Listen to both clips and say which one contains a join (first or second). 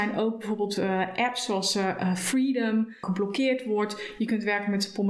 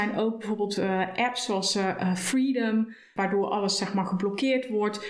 first